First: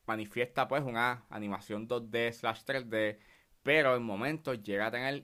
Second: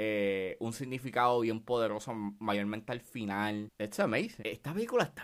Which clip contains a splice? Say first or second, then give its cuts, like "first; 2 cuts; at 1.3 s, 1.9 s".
second; 1 cut; at 3.7 s